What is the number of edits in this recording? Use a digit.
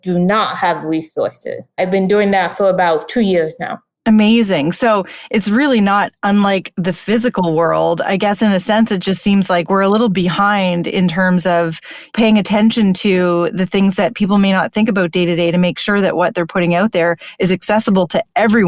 1